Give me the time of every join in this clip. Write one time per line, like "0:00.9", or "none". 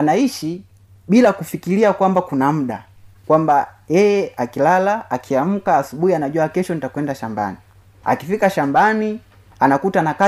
none